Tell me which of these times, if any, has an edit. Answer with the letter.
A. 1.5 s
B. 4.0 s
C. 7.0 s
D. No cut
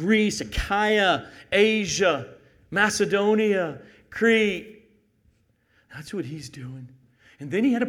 D